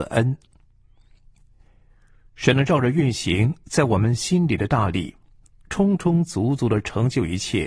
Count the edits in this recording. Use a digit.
0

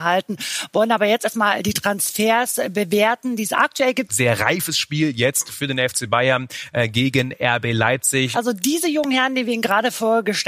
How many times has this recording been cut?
2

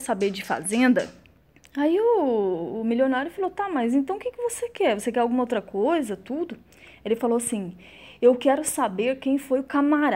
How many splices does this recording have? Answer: 0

